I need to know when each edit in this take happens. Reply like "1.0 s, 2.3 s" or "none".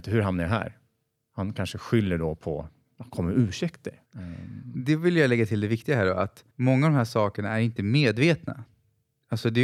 4.1 s, 6.5 s